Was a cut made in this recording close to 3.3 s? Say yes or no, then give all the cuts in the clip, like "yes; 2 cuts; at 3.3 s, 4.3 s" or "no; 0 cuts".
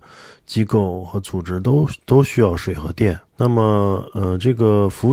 yes; 1 cut; at 3.3 s